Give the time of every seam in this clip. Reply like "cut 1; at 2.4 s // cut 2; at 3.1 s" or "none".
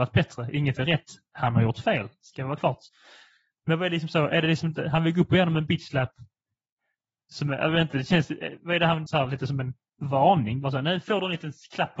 cut 1; at 9.1 s

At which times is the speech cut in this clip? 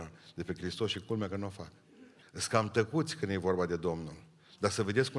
cut 1; at 2.2 s

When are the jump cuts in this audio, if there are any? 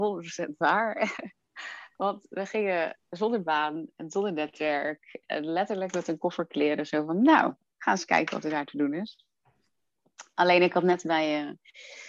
none

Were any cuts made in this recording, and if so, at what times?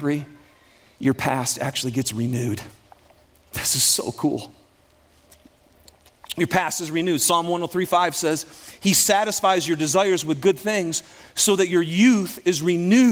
none

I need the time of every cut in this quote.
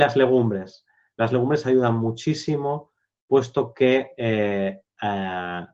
none

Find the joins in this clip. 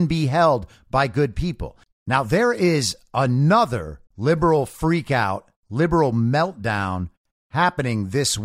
cut 1; at 1.8 s // cut 2; at 4.1 s

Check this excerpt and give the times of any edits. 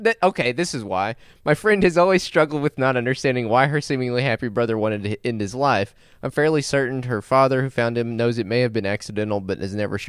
none

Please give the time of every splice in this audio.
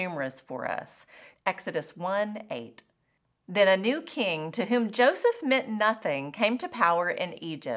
cut 1; at 1.3 s

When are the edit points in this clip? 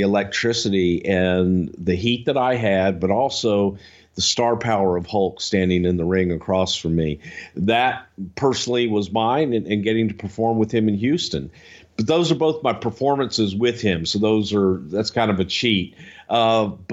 none

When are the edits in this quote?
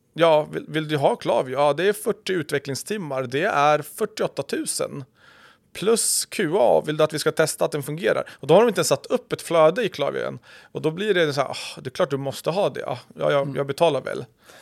none

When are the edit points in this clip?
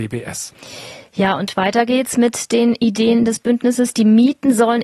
none

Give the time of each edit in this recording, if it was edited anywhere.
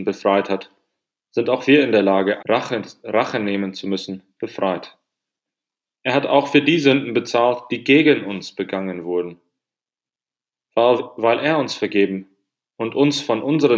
cut 1; at 2.4 s // cut 2; at 5.9 s

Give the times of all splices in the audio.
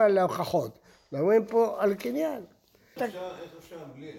cut 1; at 3.0 s

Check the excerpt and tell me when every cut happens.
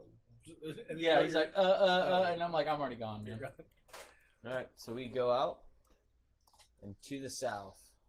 none

